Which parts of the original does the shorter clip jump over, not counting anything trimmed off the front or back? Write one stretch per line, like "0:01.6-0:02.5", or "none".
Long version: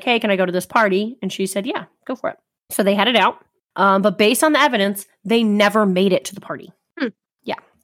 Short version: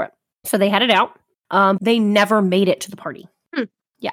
0:04.0-0:05.2